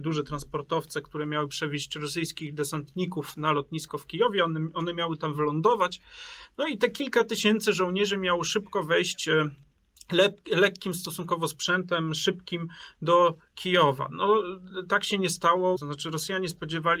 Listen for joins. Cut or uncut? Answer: cut